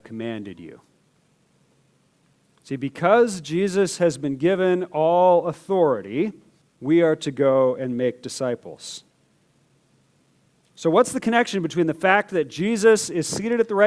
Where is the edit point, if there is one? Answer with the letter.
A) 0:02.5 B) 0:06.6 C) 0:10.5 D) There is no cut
B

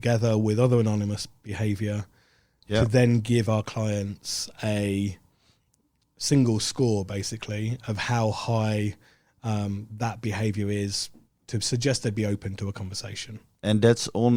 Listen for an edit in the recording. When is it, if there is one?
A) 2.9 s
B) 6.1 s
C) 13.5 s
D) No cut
D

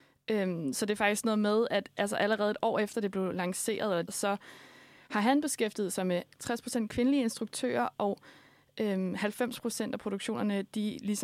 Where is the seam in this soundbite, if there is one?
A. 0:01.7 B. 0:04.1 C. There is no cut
B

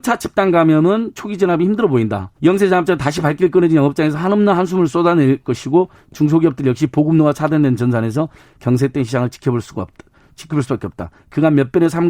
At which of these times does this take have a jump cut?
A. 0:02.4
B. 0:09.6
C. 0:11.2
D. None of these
A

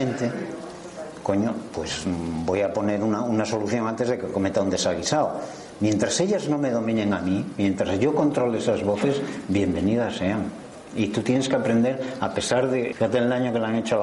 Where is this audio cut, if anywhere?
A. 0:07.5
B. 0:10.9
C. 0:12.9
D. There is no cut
C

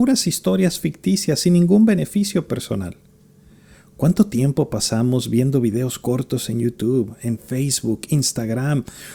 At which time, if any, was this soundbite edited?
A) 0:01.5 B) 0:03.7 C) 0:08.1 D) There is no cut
D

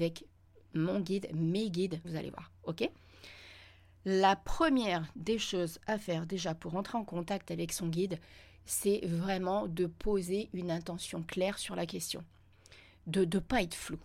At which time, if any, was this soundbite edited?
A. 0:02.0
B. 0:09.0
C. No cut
A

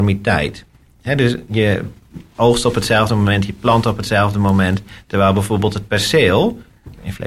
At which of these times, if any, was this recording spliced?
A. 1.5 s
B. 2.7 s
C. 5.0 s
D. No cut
A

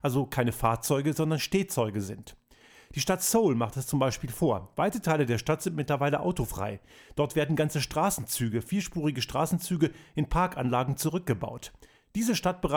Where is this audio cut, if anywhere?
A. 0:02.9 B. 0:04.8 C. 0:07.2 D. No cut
D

